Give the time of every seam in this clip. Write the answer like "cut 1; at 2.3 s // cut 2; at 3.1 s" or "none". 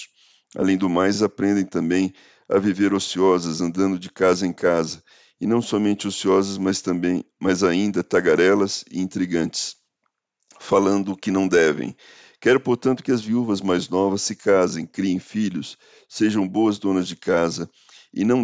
none